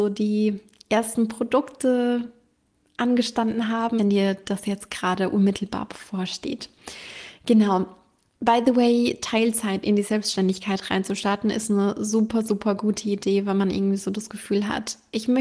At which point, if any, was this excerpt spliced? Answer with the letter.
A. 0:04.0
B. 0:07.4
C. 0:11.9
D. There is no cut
A